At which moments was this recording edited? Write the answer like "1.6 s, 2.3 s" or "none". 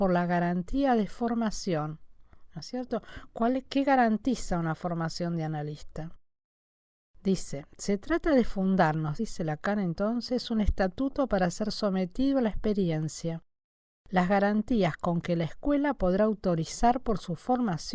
none